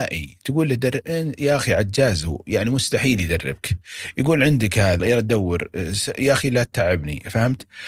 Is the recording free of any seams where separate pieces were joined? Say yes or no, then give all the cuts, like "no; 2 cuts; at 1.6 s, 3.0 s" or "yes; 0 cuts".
no; 1 cut; at 5.0 s